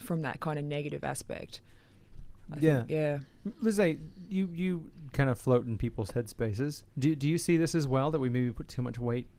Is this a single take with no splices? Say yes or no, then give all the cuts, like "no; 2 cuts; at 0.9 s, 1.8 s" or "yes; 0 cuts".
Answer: no; 1 cut; at 6.9 s